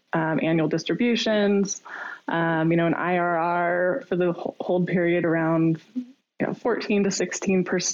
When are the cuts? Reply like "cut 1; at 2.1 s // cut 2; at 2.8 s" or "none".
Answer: none